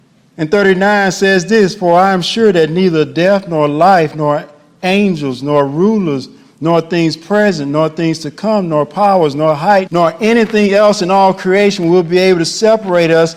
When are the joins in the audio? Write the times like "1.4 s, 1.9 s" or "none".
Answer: 9.9 s